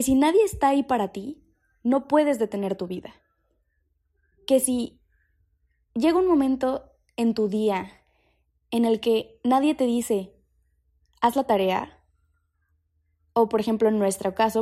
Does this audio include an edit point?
no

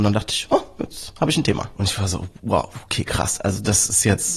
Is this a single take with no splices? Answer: no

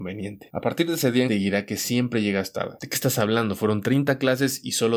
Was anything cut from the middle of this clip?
yes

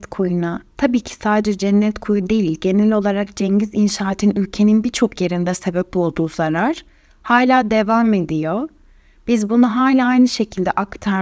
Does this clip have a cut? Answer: no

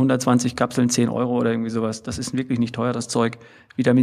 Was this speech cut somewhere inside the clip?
no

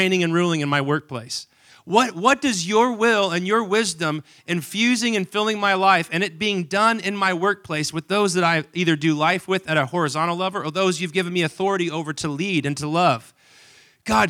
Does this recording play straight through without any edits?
no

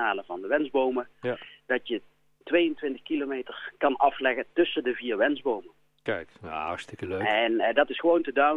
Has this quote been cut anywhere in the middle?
no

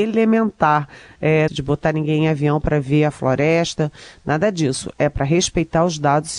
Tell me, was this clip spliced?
yes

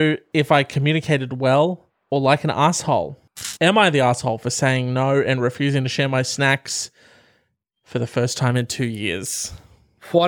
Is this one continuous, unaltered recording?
yes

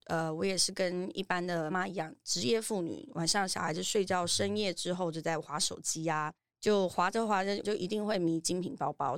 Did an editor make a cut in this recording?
yes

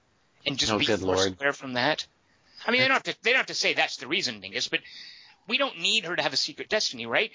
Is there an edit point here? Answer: no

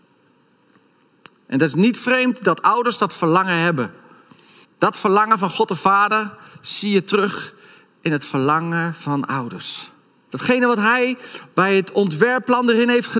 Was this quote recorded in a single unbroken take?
no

